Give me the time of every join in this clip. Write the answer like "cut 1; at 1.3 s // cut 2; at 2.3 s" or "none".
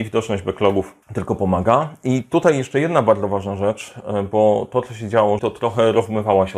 cut 1; at 1.0 s // cut 2; at 5.4 s